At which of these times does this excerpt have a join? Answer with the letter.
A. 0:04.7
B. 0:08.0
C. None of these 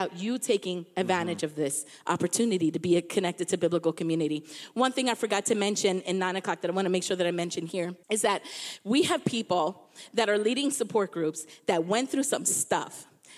B